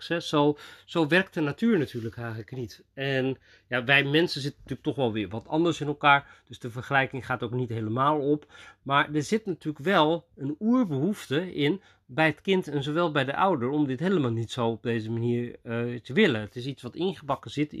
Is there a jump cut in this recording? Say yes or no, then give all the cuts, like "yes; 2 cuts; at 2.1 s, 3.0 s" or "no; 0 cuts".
no; 0 cuts